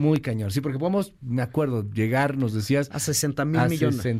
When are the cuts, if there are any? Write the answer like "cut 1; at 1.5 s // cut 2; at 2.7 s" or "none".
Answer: none